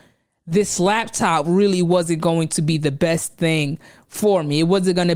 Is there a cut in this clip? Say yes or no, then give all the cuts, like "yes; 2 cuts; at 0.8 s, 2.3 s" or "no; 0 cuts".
no; 0 cuts